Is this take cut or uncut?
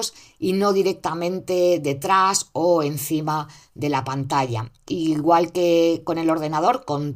uncut